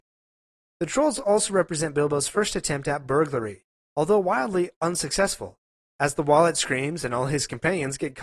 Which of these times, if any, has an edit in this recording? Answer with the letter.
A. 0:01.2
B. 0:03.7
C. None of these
C